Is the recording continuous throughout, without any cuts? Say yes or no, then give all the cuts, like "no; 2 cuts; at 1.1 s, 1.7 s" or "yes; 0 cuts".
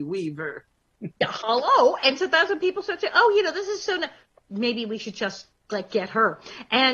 yes; 0 cuts